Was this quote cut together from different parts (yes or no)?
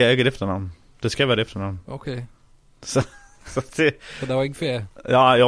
no